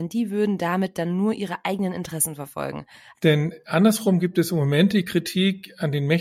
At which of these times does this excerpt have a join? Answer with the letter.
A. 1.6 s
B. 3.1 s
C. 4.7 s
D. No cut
B